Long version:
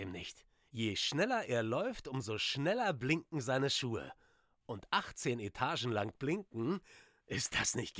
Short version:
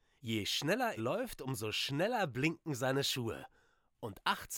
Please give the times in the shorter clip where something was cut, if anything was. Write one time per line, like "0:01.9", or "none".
0:01.0